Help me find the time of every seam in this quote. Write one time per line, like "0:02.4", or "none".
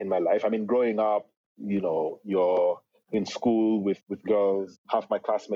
none